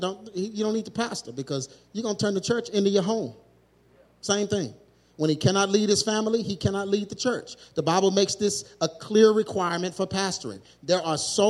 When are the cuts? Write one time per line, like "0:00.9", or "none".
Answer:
none